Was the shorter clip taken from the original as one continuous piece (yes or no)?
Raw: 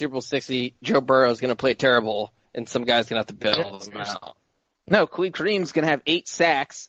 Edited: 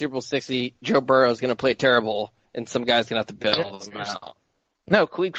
yes